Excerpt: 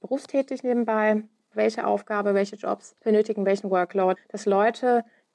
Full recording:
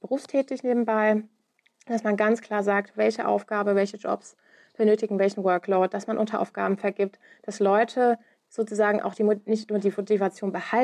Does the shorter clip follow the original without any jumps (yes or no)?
no